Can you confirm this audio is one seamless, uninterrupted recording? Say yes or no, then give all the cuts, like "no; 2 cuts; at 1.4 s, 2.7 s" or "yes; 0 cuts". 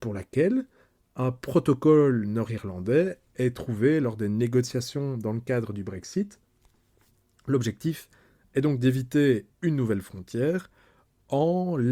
yes; 0 cuts